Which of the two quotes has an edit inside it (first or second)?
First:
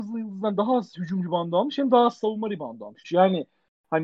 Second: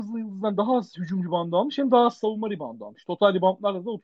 first